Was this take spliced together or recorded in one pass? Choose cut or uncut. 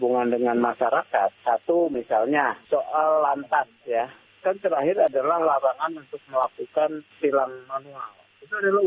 cut